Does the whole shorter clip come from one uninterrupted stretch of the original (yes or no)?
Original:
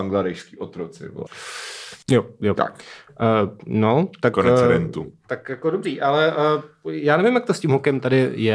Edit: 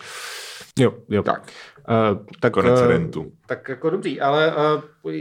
no